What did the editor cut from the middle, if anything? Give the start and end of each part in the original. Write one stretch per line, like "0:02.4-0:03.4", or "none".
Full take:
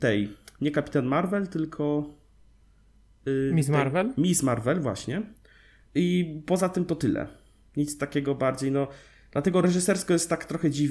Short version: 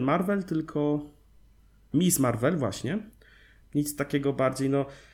0:02.9-0:04.1
0:05.8-0:07.6